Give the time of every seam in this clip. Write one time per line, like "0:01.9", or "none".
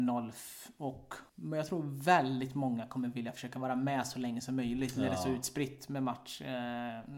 0:01.3